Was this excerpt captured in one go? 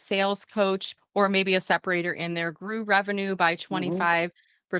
no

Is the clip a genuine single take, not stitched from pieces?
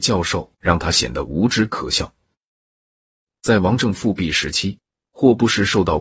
yes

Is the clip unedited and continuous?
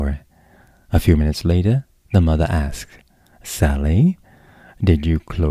yes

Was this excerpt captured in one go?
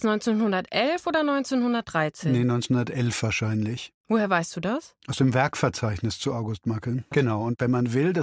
no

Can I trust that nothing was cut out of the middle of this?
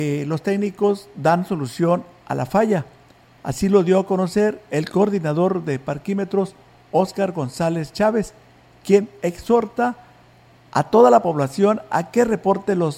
yes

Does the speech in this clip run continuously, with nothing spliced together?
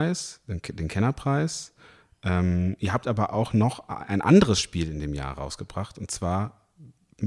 yes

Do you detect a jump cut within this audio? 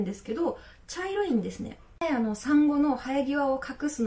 no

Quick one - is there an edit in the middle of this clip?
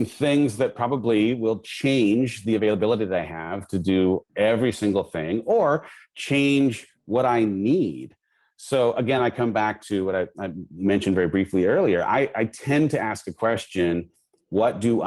no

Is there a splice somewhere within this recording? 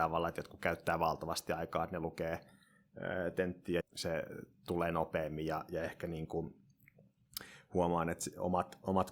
yes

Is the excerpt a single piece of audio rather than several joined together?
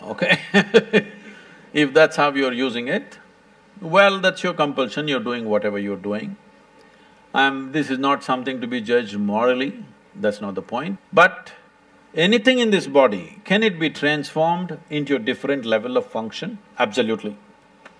no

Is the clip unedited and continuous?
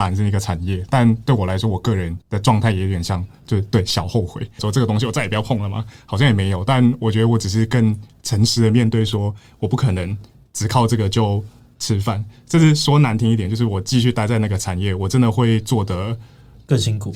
no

